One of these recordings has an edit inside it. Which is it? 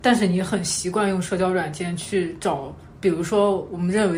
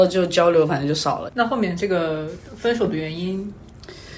second; 1 cut; at 1.3 s

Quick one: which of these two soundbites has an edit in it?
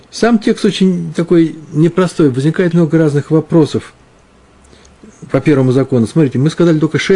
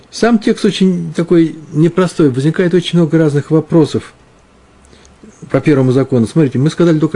first; 1 cut; at 2.7 s

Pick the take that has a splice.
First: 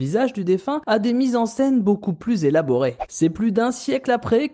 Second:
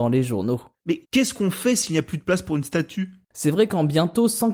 second; 1 cut; at 1.0 s

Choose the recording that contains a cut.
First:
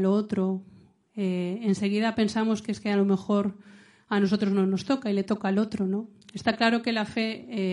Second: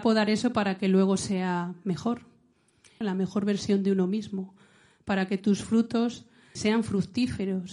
second; 2 cuts; at 3.0 s, 6.6 s

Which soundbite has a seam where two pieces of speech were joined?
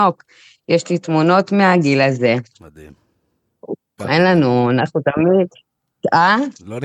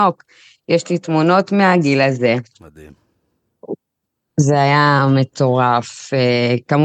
first; 1 cut; at 4.0 s

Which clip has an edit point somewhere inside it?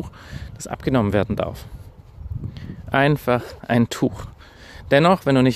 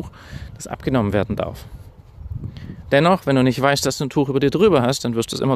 second; 1 cut; at 2.8 s

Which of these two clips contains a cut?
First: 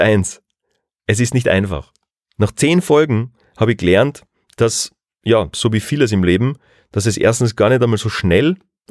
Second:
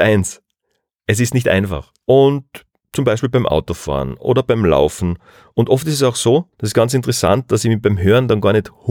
second; 2 cuts; at 2.0 s, 6.5 s

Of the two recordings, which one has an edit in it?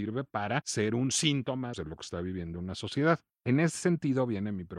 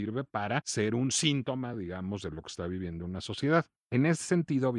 first; 1 cut; at 1.7 s

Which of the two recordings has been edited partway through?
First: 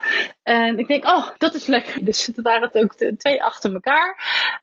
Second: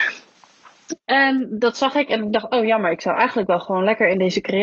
first; 1 cut; at 2.0 s

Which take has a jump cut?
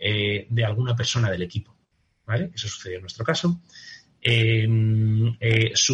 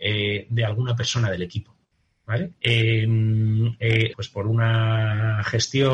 second; 2 cuts; at 2.5 s, 4.1 s

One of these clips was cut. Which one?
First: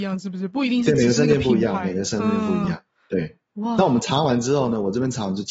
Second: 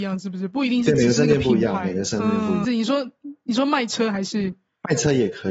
second; 1 cut; at 2.6 s

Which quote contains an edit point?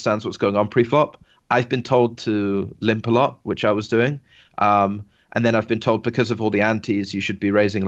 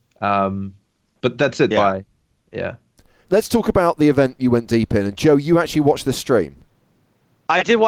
second; 1 cut; at 1.7 s

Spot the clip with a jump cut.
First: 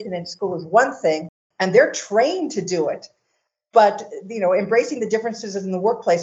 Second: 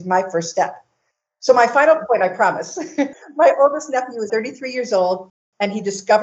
second; 1 cut; at 4.3 s

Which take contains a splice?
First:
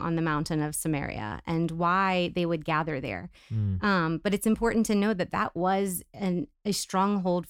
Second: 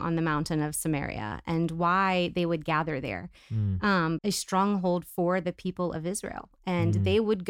second; 1 cut; at 4.2 s

